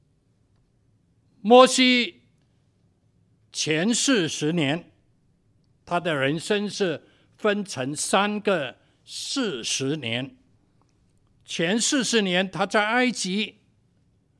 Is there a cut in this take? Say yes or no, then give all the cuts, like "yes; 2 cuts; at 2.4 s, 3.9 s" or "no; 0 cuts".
no; 0 cuts